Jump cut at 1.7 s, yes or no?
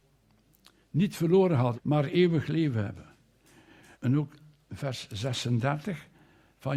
yes